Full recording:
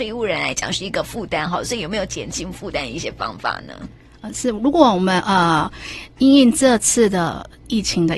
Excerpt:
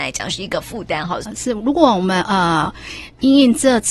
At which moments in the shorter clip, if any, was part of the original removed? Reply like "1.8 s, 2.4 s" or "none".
1.2 s